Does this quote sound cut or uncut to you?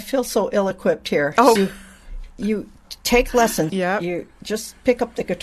cut